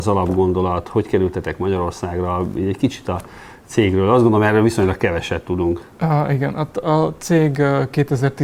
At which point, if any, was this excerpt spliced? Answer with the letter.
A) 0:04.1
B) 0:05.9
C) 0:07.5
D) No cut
D